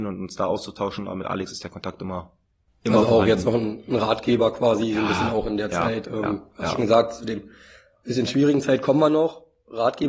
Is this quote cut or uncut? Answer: uncut